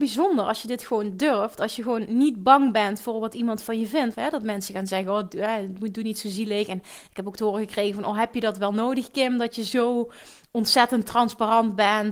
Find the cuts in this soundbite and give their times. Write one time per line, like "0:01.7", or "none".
0:04.1